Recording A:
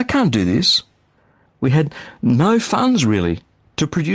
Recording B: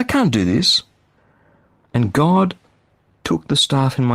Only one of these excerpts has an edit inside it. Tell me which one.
A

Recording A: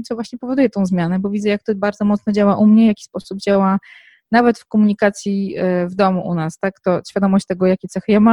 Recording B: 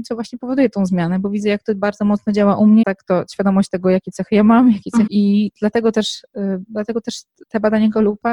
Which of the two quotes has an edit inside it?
B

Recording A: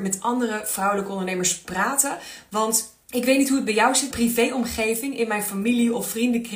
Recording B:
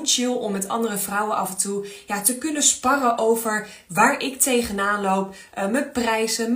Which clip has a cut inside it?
A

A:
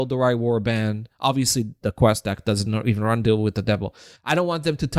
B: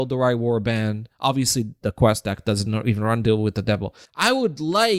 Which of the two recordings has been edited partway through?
B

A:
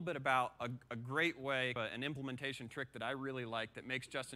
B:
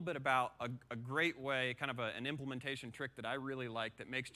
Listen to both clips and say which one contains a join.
A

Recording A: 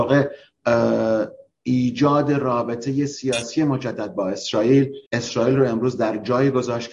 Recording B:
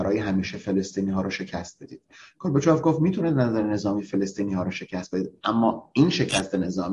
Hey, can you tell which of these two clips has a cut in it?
A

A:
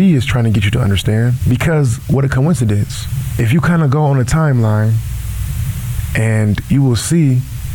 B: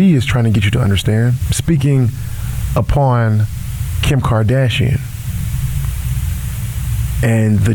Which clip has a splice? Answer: B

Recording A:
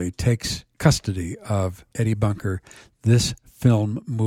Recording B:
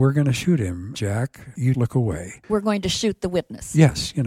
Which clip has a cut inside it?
B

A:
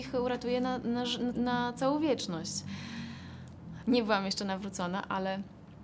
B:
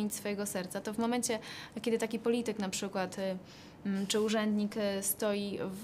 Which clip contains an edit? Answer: A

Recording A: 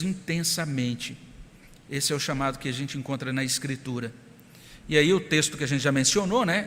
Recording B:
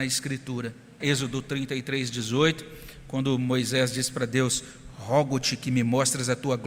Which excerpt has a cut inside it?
B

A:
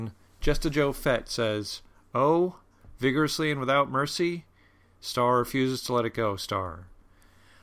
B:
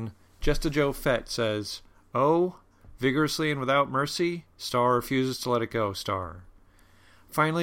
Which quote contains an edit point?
B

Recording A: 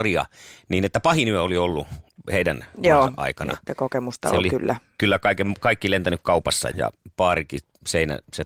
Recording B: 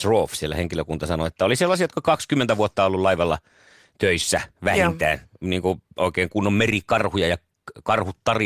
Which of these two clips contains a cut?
A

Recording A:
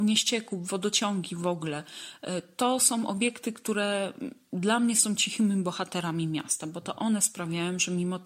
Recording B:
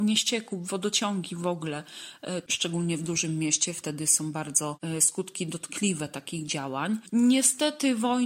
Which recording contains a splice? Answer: B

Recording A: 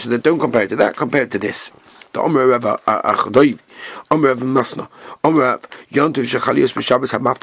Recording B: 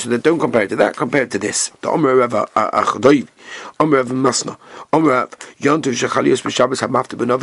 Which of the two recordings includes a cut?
B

